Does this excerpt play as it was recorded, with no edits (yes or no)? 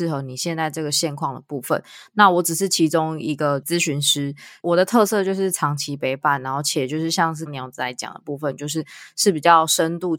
no